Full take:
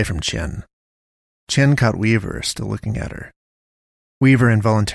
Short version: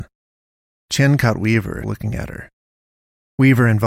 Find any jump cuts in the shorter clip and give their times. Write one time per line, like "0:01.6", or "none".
0:01.8